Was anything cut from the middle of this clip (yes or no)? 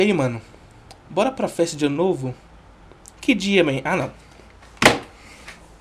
no